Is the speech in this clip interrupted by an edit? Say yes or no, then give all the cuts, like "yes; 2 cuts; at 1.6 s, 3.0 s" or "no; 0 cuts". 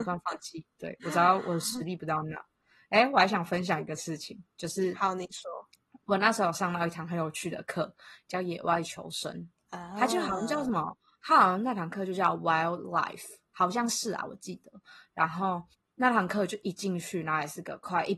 no; 0 cuts